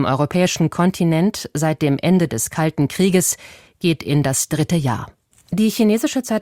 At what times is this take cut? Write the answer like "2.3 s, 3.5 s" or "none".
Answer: 5.3 s